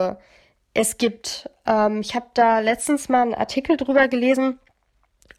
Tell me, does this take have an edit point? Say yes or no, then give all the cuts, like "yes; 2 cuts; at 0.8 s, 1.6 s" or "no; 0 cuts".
no; 0 cuts